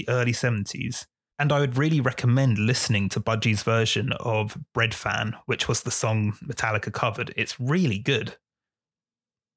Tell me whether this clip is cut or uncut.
cut